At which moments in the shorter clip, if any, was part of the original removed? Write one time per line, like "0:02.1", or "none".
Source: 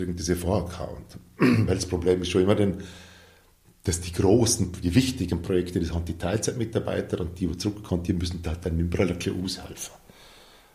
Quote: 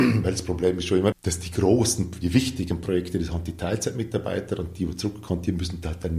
0:01.1

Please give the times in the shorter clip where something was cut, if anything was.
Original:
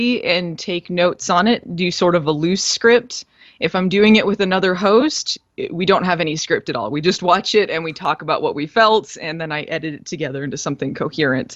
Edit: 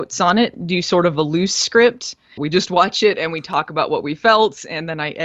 0:02.4

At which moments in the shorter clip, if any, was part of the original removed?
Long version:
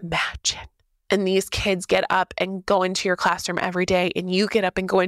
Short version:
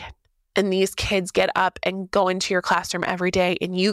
none

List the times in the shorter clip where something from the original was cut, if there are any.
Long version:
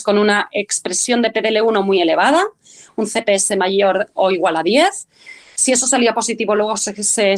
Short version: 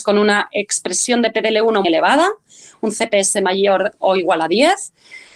0:01.8

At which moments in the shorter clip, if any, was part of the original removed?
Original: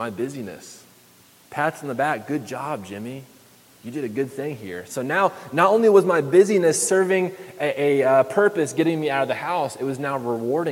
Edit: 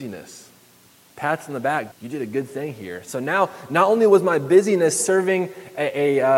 0:01.9

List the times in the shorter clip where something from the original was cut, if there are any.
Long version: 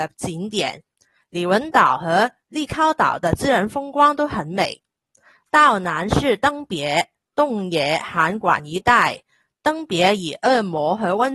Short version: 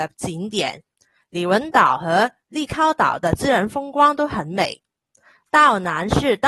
none

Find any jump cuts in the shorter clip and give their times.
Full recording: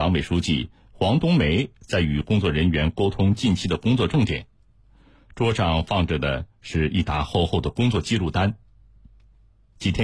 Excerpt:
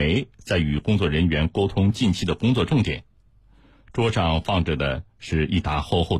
none

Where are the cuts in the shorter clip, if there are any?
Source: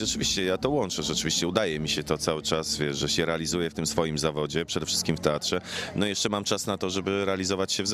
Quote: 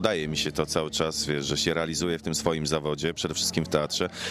none

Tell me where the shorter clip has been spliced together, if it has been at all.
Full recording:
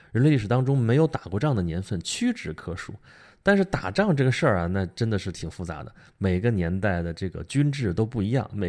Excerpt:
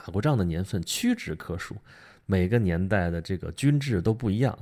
0:02.2

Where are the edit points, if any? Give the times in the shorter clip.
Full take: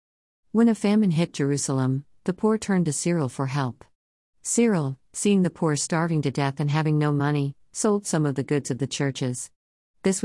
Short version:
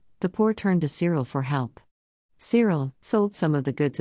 0:03.0

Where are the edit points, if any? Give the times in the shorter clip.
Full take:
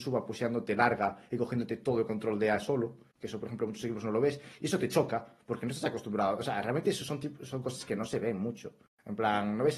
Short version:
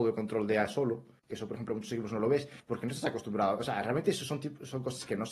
0:02.6

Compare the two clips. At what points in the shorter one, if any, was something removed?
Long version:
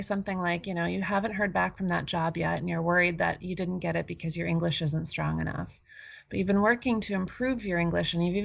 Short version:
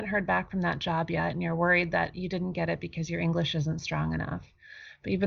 none

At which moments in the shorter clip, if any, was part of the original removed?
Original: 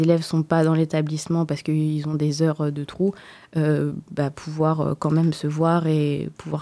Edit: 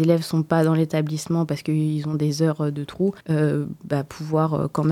0:03.2

